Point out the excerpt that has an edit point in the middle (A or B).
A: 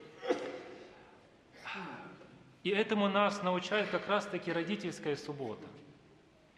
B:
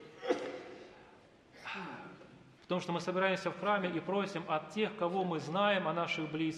B